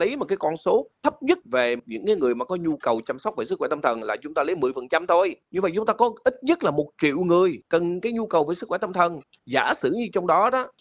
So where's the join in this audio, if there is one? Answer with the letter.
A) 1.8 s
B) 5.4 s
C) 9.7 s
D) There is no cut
B